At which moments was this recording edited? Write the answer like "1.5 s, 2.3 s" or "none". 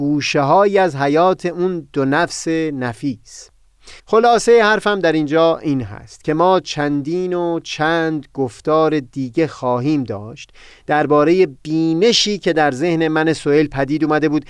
4.0 s